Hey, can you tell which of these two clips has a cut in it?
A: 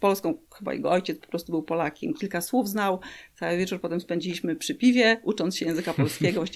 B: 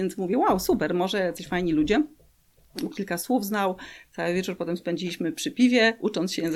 B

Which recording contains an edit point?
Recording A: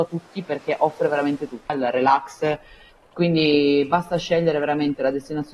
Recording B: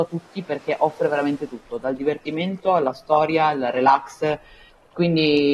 A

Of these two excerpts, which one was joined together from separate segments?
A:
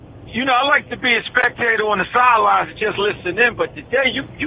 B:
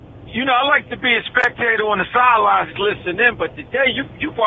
B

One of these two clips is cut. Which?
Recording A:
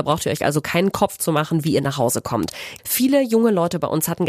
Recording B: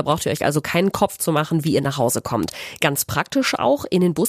A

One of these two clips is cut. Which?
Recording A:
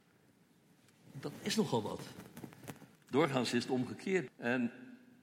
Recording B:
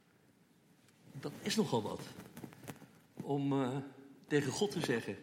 A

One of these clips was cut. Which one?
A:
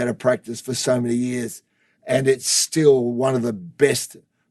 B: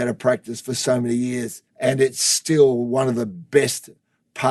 B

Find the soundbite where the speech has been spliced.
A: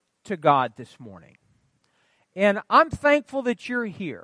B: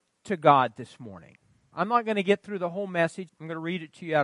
B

